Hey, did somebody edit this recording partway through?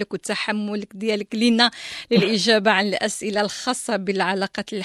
no; 0 cuts

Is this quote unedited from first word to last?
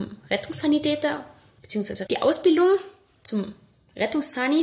no; 1 cut; at 2.1 s

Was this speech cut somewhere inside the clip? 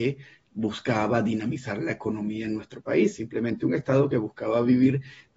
no; 0 cuts

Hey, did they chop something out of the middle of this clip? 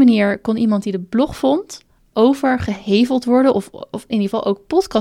no; 0 cuts

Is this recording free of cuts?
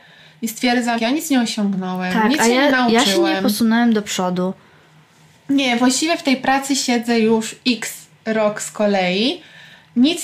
no; 1 cut; at 1.0 s

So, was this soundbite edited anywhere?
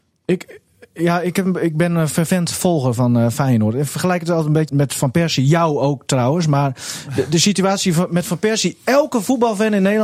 yes; 1 cut; at 4.7 s

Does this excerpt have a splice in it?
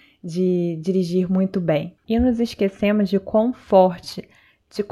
yes; 1 cut; at 2.0 s

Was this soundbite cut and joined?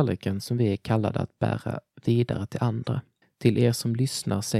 yes; 1 cut; at 3.2 s

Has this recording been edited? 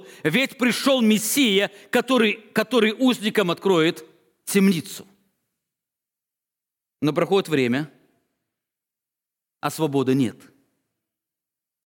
no; 0 cuts

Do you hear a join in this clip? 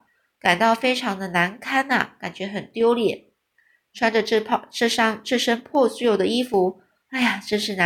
no; 0 cuts

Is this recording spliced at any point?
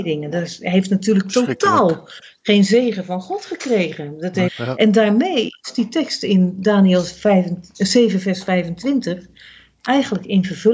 yes; 1 cut; at 4.5 s

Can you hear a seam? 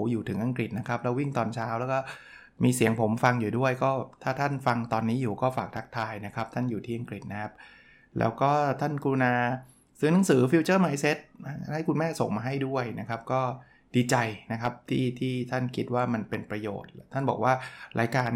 no; 0 cuts

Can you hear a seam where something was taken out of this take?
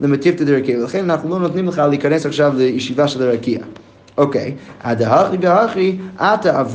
no; 0 cuts

